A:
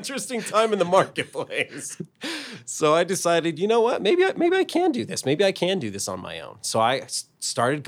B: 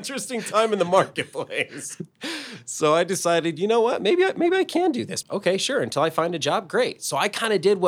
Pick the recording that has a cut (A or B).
B